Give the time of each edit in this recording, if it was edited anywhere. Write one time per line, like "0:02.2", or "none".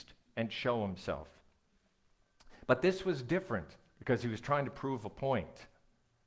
none